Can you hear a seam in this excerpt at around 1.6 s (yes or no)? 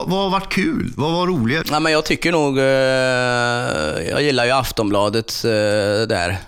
yes